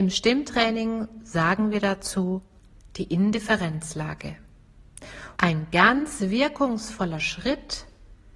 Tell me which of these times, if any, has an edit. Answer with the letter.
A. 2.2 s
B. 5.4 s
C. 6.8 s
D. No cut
B